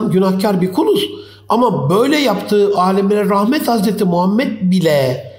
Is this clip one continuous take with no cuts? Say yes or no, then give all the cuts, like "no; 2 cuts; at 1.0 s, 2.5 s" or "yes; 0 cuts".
yes; 0 cuts